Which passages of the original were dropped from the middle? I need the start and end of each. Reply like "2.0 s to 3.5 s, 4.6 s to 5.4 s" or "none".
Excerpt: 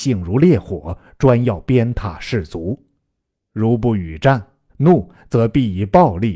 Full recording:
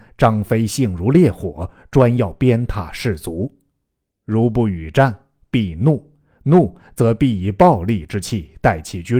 5.4 s to 6.4 s